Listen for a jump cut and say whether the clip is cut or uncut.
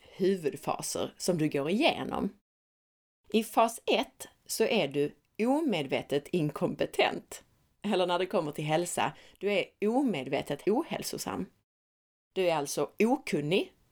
uncut